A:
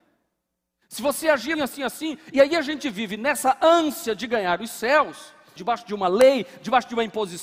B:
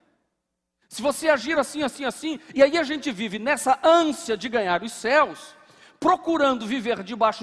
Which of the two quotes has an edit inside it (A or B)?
A